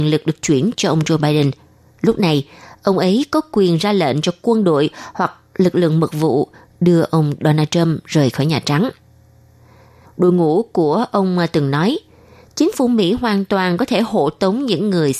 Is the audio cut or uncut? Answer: cut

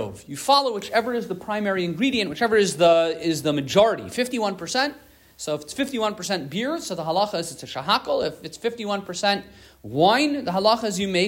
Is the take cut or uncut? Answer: uncut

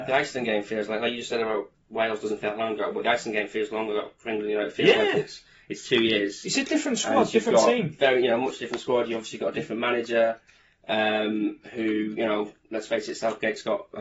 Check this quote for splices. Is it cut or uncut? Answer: uncut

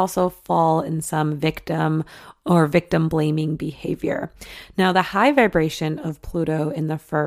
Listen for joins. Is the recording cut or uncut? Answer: uncut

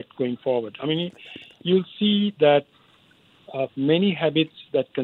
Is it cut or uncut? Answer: cut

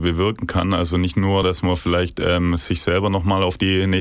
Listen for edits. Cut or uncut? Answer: uncut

